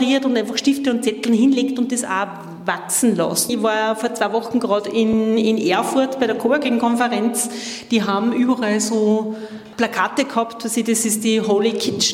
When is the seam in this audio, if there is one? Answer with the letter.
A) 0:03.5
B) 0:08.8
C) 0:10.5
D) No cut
A